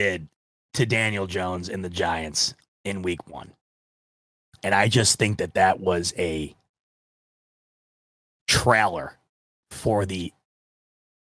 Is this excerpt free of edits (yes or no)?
yes